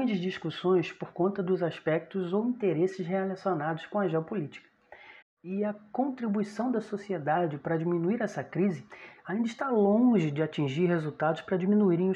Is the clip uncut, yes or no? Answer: no